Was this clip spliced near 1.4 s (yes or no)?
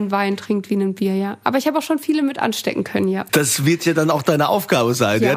no